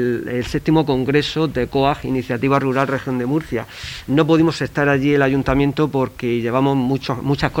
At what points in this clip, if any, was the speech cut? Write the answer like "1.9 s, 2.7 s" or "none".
none